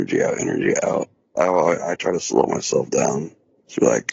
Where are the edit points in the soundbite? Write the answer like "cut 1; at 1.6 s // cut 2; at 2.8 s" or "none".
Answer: cut 1; at 1.4 s